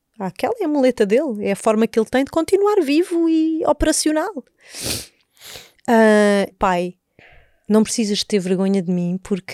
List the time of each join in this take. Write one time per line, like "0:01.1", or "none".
0:06.5